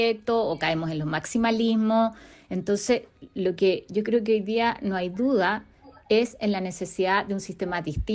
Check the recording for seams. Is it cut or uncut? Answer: uncut